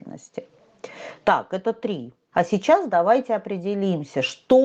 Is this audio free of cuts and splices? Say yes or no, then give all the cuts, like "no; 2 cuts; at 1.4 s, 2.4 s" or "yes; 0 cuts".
no; 1 cut; at 2.3 s